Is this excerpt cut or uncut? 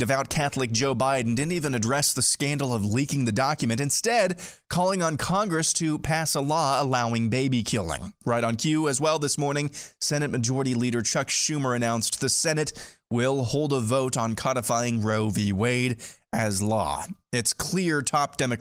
uncut